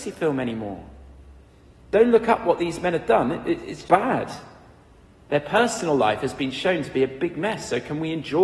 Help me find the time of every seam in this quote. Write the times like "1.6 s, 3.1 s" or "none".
1.8 s, 3.9 s